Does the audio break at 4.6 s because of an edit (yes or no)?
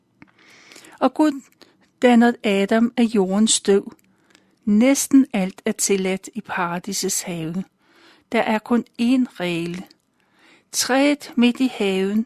yes